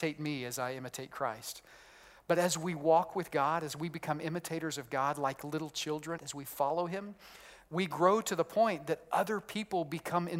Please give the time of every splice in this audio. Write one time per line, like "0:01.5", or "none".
0:06.2